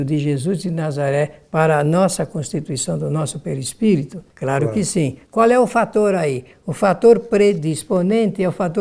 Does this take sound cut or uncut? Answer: cut